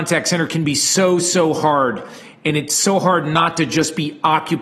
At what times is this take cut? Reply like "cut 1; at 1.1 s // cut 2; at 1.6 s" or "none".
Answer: none